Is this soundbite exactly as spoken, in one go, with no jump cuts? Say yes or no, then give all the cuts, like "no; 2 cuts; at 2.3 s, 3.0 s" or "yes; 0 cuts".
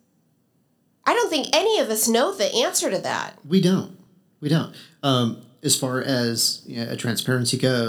yes; 0 cuts